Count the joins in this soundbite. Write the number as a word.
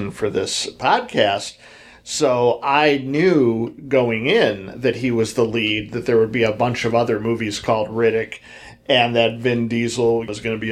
zero